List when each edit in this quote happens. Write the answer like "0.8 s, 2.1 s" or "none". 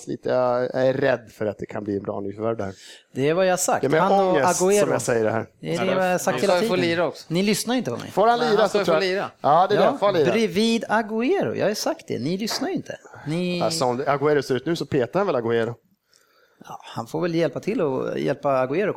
none